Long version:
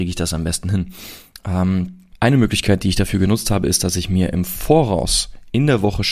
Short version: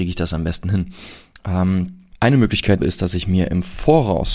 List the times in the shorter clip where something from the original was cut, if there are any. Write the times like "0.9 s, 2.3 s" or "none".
2.8 s